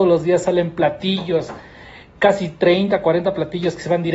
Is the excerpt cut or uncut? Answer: uncut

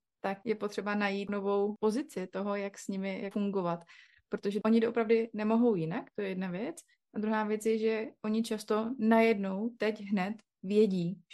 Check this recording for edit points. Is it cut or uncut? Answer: uncut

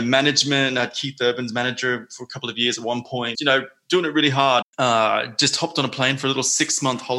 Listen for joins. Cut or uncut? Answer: cut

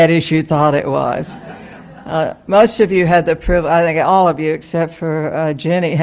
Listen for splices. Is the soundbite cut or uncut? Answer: uncut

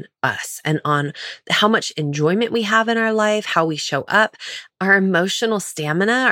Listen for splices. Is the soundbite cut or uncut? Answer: uncut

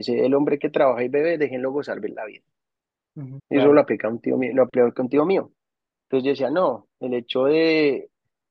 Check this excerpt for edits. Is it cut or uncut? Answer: cut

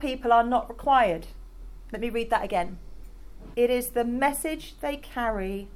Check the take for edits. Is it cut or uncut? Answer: cut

